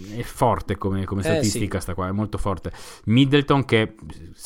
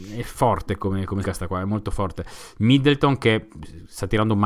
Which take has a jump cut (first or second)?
second